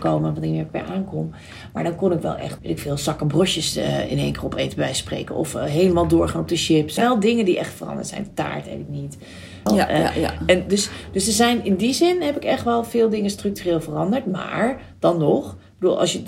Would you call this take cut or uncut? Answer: cut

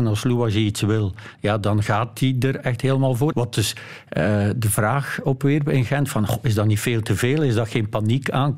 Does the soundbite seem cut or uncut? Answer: cut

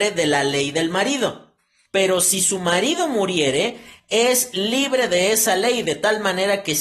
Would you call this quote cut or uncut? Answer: cut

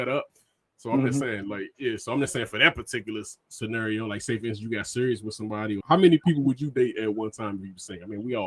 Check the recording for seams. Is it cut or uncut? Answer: cut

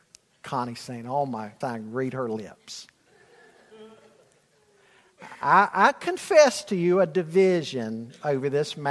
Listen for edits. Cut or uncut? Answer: cut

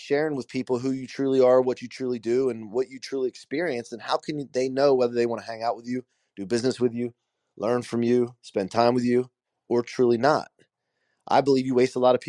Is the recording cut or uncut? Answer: uncut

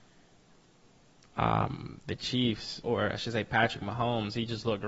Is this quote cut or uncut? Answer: uncut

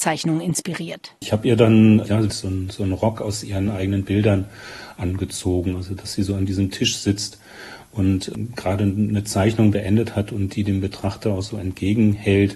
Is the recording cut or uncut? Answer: cut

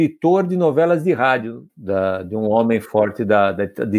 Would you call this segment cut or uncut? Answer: cut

